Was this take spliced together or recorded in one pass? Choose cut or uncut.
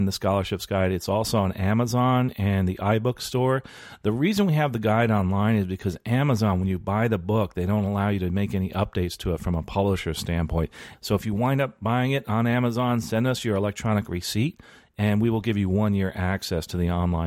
cut